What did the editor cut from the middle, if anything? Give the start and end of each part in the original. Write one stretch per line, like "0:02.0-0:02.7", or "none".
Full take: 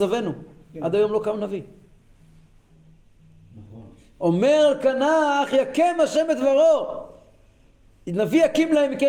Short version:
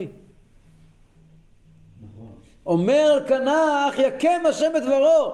none